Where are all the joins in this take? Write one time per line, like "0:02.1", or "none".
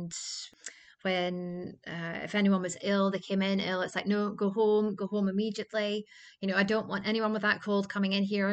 none